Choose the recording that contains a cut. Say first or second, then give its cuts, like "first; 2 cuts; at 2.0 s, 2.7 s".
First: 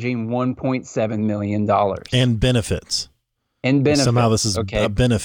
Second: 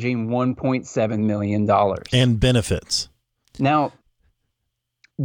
second; 1 cut; at 3.4 s